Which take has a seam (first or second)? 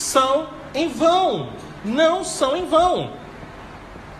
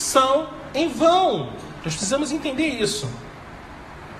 second